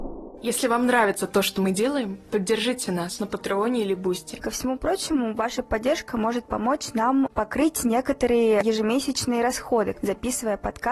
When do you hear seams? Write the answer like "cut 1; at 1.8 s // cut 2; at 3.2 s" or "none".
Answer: cut 1; at 4.4 s // cut 2; at 9.9 s